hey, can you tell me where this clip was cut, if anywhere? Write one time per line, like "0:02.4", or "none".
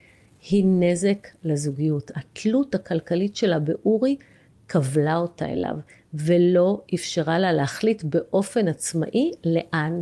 0:02.1